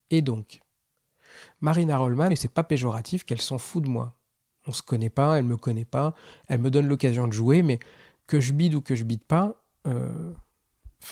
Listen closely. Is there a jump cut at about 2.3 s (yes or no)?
yes